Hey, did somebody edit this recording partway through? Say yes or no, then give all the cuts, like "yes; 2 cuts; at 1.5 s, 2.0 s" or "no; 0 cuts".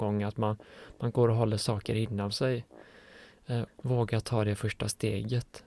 yes; 1 cut; at 3.7 s